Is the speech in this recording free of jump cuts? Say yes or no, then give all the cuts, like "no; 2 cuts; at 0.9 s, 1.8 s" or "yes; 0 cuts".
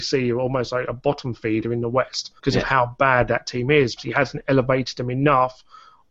no; 2 cuts; at 2.4 s, 4.0 s